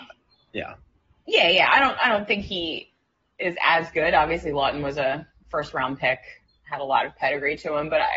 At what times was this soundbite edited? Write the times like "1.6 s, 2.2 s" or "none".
none